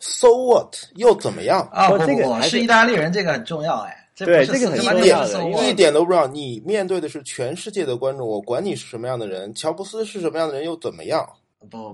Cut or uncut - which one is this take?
uncut